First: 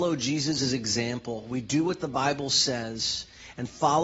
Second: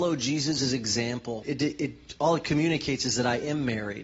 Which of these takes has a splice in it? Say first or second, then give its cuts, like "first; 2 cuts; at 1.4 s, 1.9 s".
second; 1 cut; at 1.4 s